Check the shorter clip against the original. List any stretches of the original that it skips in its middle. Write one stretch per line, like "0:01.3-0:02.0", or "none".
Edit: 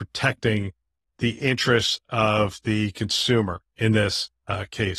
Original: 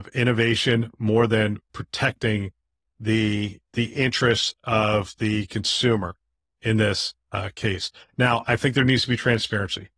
0:02.9-0:03.7
0:06.2-0:06.5